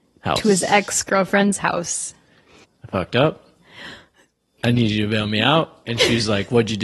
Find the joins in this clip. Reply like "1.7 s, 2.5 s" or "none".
2.6 s